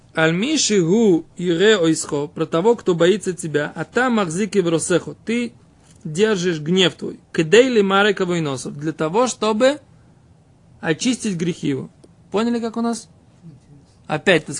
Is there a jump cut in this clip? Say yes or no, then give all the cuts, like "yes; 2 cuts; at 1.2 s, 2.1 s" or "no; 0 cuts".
no; 0 cuts